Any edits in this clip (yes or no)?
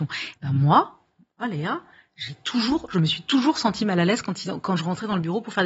no